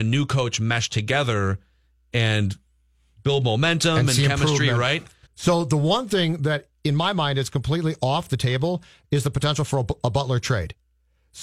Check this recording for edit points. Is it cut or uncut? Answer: cut